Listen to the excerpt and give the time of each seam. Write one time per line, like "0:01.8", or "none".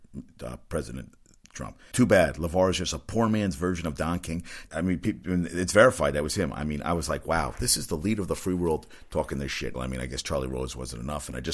0:01.9
0:04.7
0:09.7